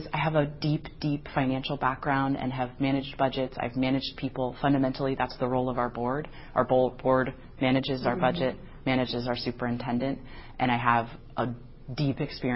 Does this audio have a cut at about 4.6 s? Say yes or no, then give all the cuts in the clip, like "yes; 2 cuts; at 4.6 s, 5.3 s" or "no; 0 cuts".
no; 0 cuts